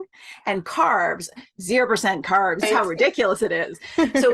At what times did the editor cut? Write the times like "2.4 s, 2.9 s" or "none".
2.6 s